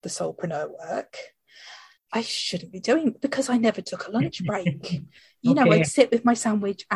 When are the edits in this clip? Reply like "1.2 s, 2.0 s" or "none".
2.0 s